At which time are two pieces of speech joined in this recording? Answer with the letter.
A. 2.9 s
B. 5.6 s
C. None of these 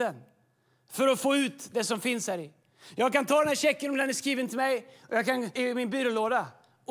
B